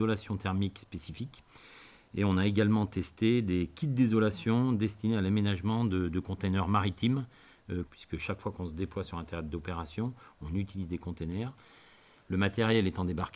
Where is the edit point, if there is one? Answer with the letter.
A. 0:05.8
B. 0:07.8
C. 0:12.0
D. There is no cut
B